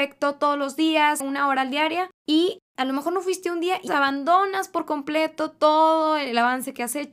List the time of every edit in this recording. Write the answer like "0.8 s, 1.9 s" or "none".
1.2 s, 3.9 s